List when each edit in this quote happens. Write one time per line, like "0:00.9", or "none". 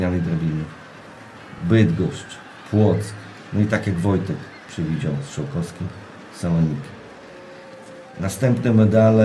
none